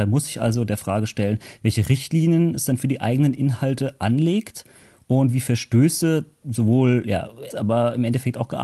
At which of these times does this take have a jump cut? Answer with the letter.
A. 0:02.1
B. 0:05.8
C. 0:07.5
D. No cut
C